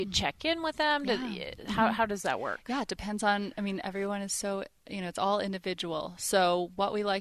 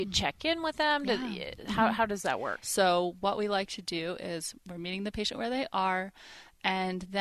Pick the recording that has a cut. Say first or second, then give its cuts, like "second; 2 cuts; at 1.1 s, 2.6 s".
second; 1 cut; at 2.6 s